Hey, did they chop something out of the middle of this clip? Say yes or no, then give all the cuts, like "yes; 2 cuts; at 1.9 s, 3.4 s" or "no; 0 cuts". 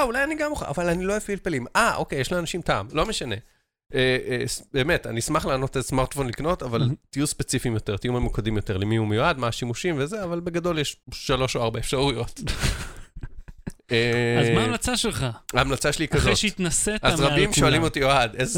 yes; 1 cut; at 11.0 s